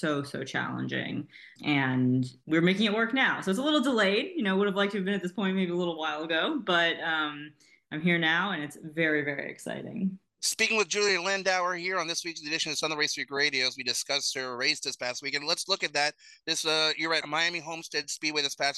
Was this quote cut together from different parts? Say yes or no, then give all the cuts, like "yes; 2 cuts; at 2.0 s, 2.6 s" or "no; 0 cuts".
no; 0 cuts